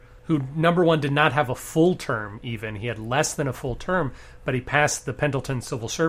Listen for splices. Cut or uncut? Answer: uncut